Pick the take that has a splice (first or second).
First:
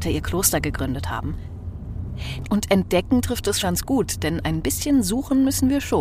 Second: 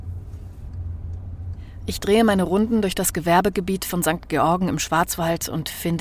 first